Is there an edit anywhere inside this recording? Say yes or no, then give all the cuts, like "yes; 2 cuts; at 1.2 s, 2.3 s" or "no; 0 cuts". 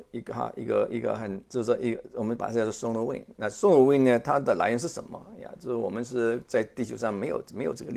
no; 0 cuts